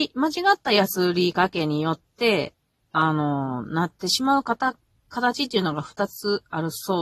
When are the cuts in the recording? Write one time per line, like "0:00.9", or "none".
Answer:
none